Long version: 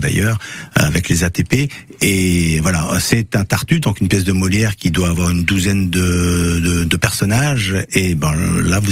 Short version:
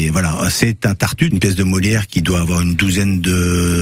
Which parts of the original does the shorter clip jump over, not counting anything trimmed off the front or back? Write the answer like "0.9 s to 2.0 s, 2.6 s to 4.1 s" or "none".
3.8 s to 4.0 s